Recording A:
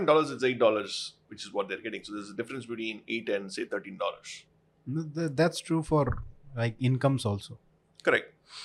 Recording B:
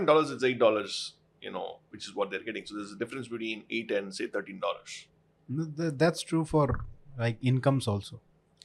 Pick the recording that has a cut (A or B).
A